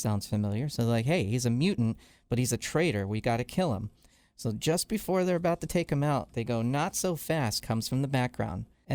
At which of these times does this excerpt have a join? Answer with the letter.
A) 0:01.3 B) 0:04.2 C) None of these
C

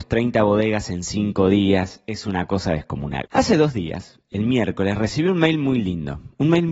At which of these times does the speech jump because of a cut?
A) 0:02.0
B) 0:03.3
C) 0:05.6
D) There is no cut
B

